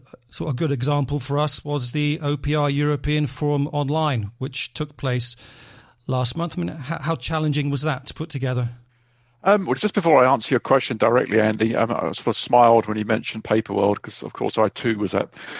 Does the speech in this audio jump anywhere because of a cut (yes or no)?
no